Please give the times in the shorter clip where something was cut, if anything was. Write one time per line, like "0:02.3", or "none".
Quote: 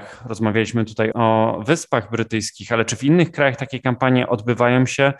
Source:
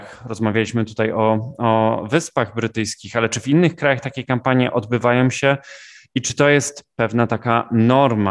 0:01.1